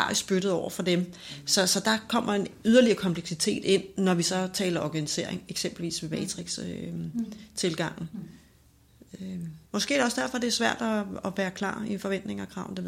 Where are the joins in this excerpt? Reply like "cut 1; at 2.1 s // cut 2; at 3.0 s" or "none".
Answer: cut 1; at 9.6 s